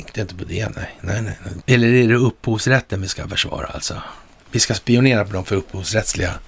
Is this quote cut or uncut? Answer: cut